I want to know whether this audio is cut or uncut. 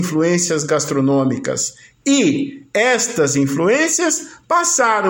uncut